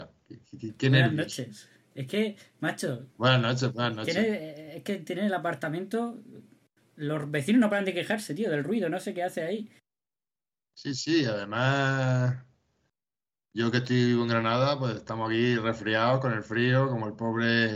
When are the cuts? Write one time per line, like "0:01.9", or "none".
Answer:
none